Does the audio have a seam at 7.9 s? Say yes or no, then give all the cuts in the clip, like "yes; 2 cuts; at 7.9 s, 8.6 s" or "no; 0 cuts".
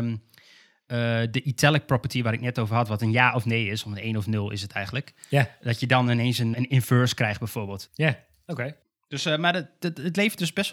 yes; 2 cuts; at 6.5 s, 7.9 s